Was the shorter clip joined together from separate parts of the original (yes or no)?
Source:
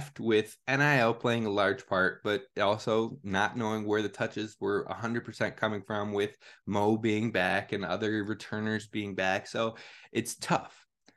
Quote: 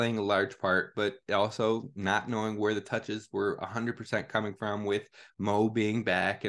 no